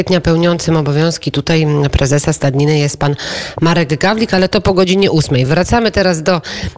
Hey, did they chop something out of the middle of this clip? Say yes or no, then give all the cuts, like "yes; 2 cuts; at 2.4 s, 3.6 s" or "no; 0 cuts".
no; 0 cuts